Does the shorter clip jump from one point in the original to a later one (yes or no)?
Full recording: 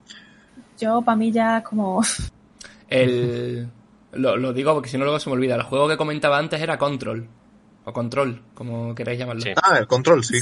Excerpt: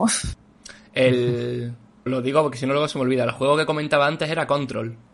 yes